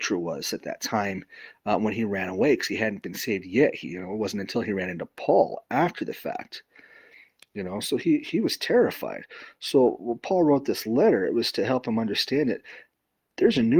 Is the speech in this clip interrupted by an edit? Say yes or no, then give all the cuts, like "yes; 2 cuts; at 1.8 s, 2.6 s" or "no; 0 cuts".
no; 0 cuts